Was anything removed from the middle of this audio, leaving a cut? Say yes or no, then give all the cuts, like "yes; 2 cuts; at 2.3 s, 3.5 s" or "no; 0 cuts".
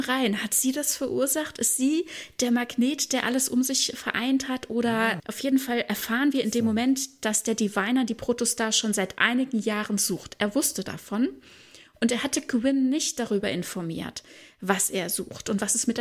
yes; 1 cut; at 5.2 s